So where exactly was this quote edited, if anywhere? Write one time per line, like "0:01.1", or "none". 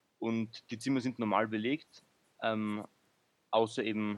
none